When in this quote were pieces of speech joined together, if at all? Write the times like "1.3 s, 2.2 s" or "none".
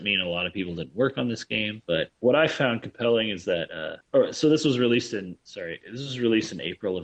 none